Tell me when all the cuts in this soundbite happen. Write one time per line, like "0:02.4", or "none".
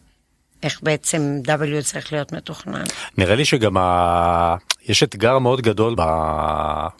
0:06.0